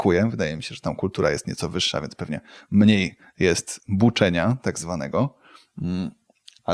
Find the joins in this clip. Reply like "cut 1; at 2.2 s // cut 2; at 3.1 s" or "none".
none